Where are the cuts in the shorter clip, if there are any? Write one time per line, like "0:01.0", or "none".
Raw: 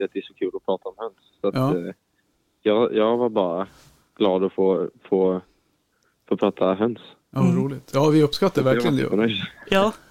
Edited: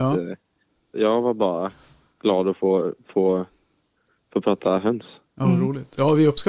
0:00.9